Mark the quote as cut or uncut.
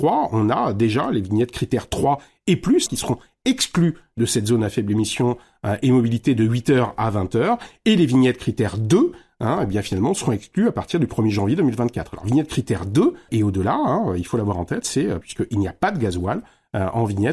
cut